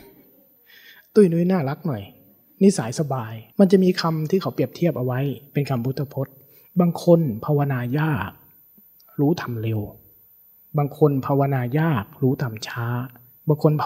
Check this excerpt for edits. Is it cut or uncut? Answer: cut